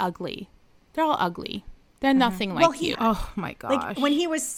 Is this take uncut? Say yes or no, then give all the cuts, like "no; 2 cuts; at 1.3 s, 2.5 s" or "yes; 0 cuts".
no; 1 cut; at 2.9 s